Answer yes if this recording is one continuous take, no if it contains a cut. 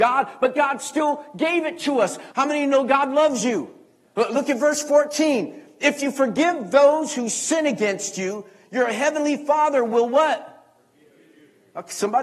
no